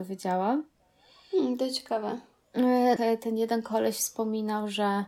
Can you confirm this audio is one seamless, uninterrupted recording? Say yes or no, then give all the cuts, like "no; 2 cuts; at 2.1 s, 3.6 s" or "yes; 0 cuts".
no; 1 cut; at 3.0 s